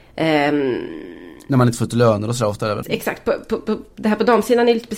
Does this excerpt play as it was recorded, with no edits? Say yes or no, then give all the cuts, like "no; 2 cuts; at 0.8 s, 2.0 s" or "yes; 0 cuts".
no; 1 cut; at 2.8 s